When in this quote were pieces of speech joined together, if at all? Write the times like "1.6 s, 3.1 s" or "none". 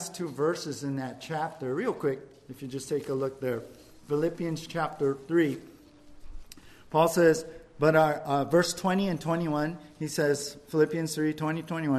none